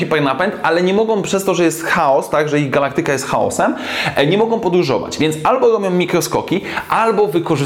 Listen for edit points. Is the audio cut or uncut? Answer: uncut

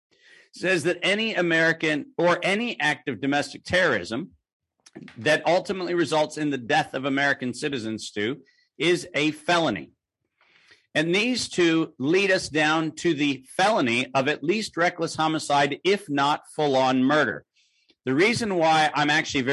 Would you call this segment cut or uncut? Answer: uncut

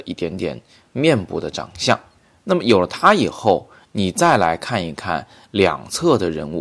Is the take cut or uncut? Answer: uncut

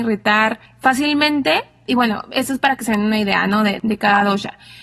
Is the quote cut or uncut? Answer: uncut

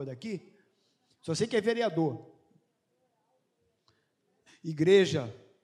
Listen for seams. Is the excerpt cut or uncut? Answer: cut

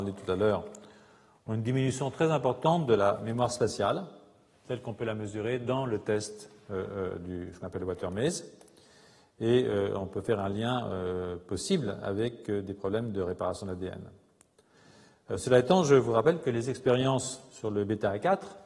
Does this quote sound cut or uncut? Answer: uncut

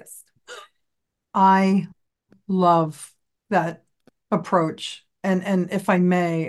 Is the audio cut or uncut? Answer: uncut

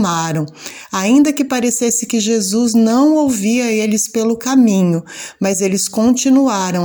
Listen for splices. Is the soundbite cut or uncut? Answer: uncut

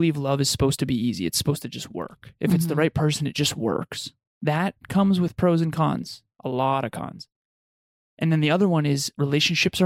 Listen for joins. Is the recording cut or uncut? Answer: uncut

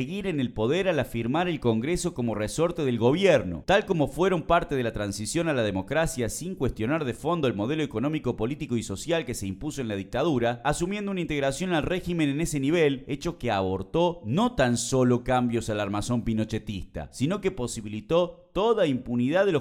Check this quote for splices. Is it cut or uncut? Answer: cut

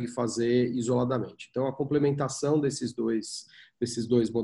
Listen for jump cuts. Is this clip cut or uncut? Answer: uncut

